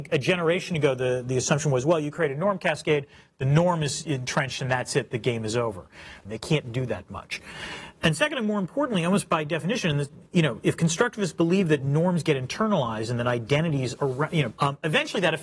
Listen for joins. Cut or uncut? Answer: cut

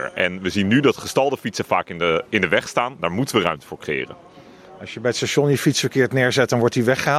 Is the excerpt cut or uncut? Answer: uncut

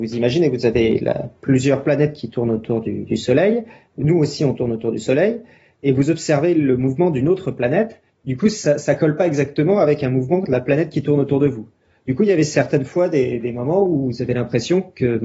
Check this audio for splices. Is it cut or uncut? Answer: uncut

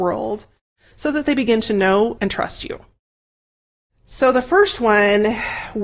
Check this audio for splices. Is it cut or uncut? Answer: cut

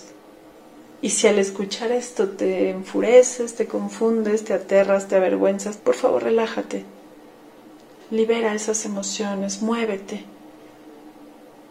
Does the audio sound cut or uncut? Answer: cut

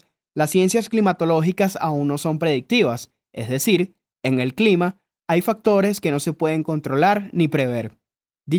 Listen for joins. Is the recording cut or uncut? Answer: uncut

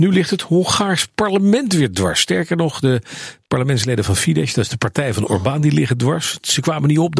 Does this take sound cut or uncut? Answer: uncut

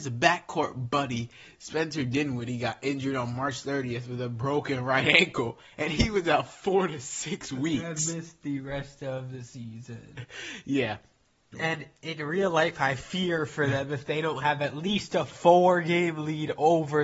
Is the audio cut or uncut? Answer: cut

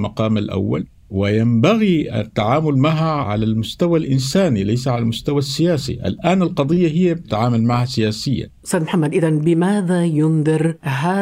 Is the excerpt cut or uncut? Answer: uncut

